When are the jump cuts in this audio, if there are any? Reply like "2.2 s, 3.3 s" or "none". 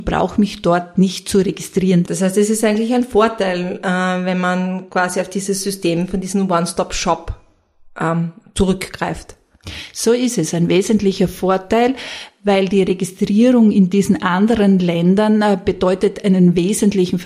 2.0 s